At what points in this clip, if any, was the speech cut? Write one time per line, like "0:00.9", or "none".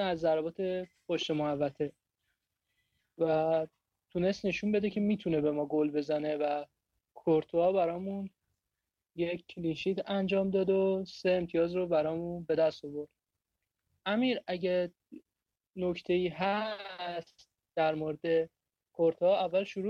none